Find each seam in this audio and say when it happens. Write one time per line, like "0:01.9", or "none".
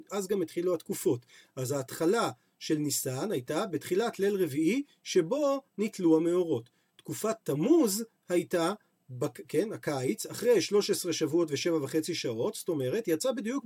none